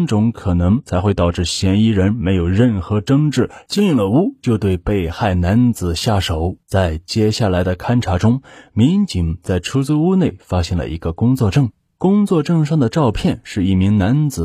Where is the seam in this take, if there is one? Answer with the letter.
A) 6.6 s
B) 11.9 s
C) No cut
A